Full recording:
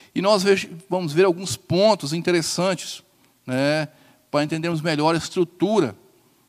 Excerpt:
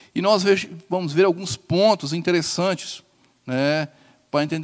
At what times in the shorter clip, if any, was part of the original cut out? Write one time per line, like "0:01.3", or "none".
none